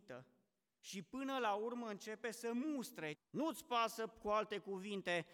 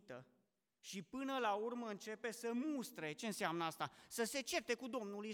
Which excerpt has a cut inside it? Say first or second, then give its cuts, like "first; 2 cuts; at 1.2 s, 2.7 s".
first; 1 cut; at 3.1 s